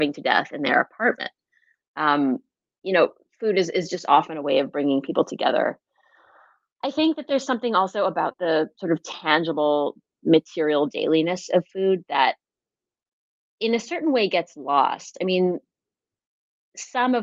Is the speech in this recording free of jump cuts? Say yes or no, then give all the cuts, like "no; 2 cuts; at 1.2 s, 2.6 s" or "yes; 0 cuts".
yes; 0 cuts